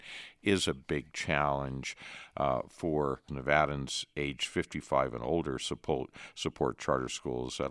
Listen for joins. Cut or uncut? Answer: cut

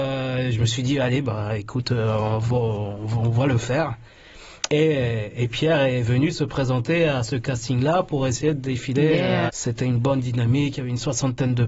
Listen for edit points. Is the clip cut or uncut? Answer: cut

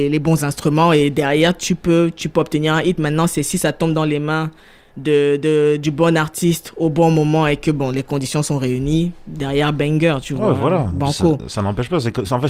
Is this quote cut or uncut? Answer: uncut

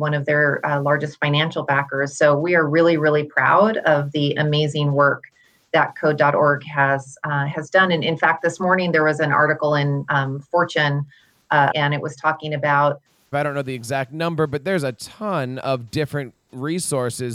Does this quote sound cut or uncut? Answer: cut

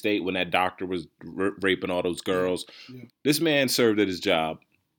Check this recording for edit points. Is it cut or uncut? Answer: cut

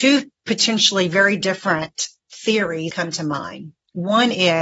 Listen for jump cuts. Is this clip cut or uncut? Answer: cut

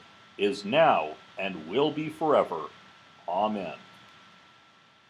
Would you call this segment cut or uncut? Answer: uncut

